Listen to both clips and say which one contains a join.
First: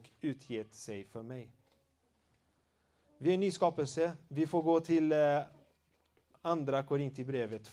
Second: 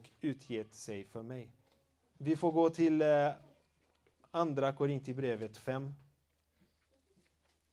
second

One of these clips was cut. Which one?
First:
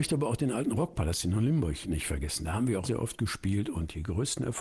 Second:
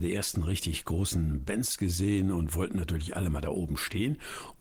first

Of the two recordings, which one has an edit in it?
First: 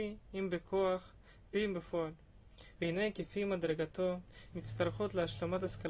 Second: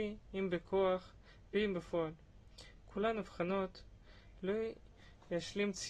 first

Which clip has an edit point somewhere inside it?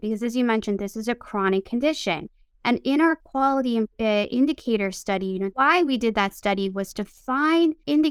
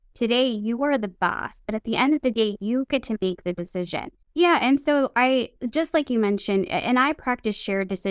second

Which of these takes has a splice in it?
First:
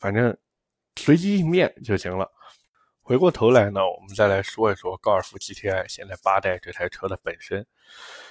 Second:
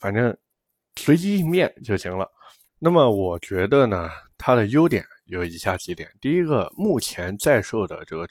second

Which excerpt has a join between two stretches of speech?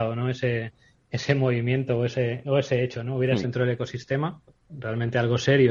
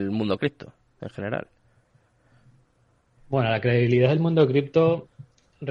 first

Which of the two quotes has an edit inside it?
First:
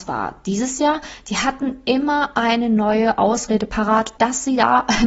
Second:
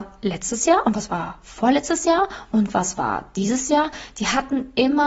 first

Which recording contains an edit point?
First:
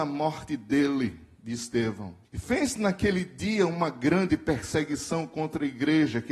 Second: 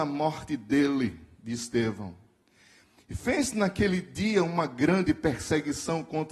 first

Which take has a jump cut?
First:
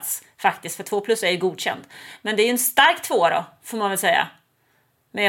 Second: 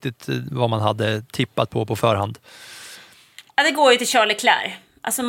second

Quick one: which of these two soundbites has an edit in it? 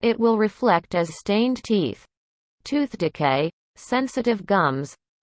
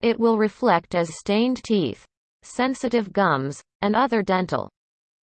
second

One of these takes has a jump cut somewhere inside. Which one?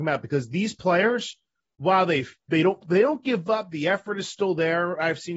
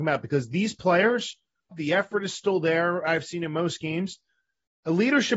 second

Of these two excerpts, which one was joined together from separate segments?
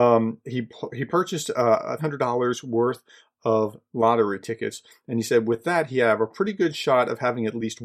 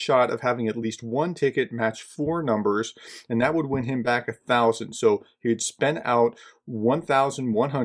first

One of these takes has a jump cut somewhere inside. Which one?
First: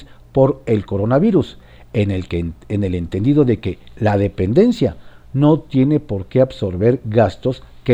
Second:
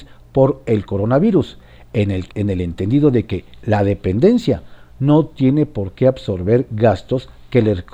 second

